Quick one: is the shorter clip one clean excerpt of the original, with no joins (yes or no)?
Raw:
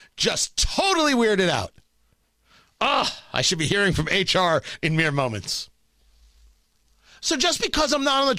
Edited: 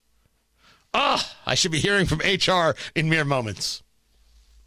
yes